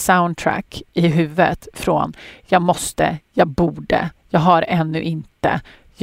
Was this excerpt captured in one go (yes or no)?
yes